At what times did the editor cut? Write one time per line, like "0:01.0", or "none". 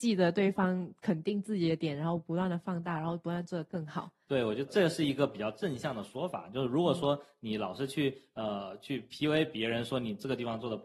0:04.7